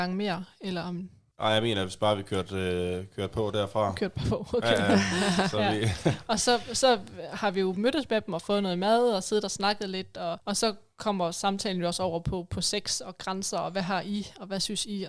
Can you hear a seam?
no; 0 cuts

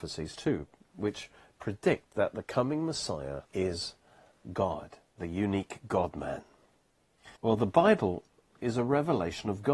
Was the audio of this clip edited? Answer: yes; 2 cuts; at 3.5 s, 7.4 s

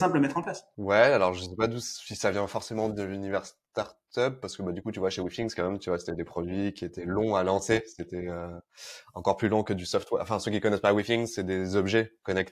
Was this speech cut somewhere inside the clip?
no; 0 cuts

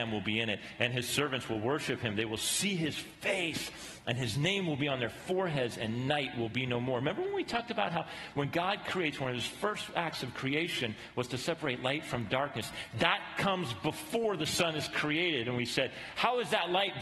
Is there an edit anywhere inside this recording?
no; 0 cuts

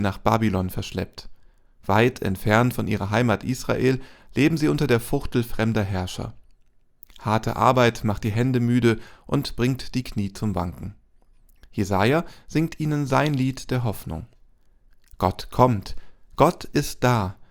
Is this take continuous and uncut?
yes; 0 cuts

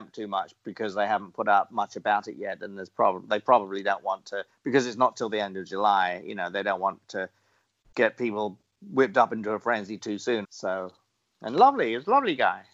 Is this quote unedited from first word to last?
no; 1 cut; at 10.4 s

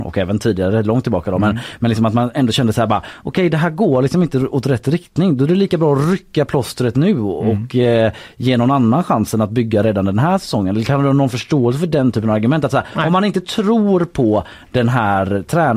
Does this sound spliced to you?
no; 0 cuts

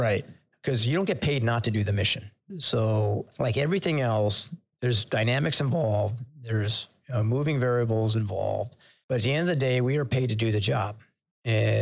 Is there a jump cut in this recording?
yes; 1 cut; at 2.5 s

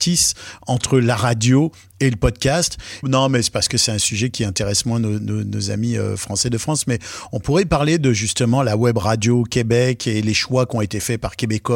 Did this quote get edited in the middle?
yes; 1 cut; at 3.0 s

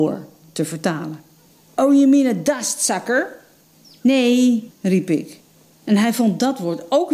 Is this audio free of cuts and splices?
no; 1 cut; at 4.7 s

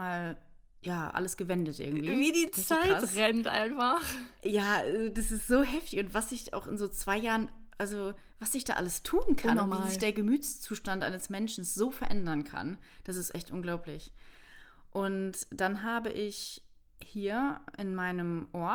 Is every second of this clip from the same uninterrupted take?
yes; 0 cuts

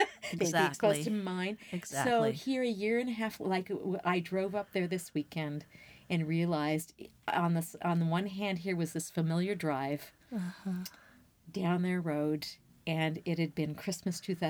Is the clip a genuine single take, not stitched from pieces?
yes; 0 cuts

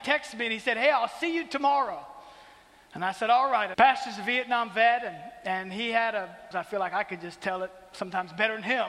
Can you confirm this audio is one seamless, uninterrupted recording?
no; 2 cuts; at 3.7 s, 6.5 s

